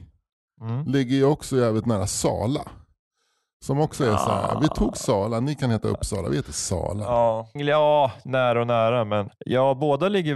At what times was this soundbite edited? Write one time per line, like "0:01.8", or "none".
0:07.6
0:09.3